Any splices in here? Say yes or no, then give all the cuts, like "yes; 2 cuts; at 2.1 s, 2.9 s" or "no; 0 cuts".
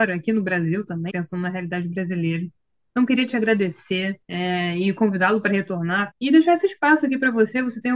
yes; 3 cuts; at 1.1 s, 4.2 s, 6.1 s